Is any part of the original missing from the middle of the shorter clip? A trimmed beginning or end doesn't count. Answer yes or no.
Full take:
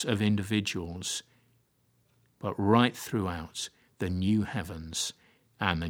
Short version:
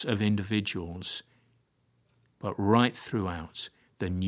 no